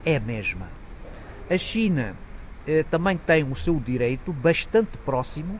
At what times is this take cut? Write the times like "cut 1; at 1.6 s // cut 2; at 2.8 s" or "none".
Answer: none